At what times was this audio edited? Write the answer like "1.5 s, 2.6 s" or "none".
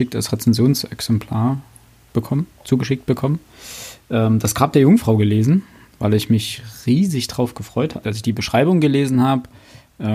8.0 s